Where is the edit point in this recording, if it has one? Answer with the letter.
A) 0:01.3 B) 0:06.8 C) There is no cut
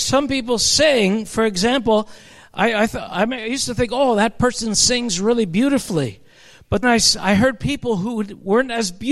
B